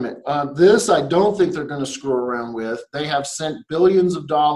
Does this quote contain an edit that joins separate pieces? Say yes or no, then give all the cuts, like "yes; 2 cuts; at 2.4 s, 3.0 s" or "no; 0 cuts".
no; 0 cuts